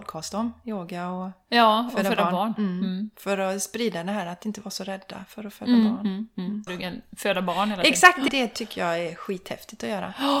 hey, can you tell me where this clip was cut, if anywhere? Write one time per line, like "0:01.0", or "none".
0:06.7
0:08.3